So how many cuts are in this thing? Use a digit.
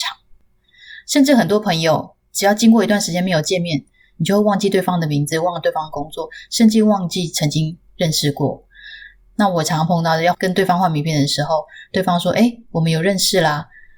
0